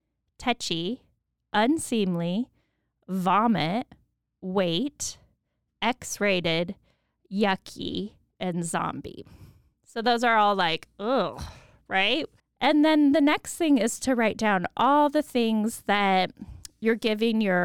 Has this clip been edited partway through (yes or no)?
yes